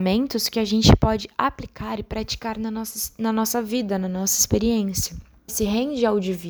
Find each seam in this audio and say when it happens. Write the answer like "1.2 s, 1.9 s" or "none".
5.5 s